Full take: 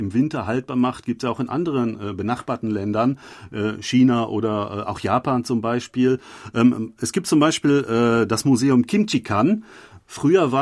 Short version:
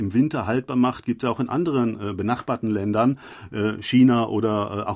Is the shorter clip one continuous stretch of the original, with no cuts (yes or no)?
yes